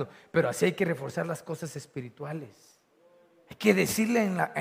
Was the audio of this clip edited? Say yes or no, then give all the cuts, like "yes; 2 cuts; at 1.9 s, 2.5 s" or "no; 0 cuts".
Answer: no; 0 cuts